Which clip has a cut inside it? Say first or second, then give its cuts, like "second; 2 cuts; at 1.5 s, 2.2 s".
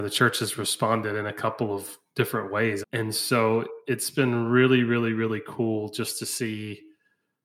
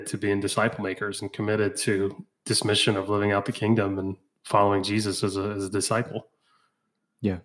first; 1 cut; at 2.8 s